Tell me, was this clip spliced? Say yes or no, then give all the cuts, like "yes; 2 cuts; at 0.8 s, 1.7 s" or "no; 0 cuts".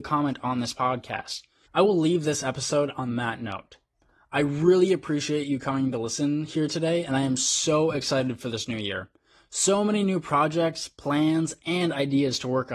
yes; 1 cut; at 1.7 s